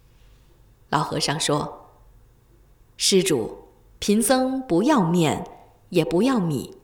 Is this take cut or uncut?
uncut